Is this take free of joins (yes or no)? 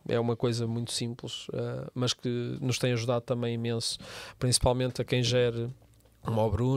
yes